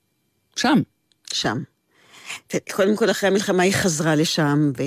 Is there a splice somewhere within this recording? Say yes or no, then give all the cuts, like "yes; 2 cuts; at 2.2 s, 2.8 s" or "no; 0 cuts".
no; 0 cuts